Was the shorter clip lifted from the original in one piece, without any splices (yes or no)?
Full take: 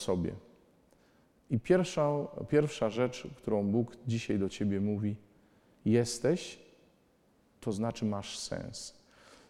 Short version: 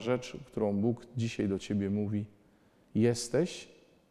yes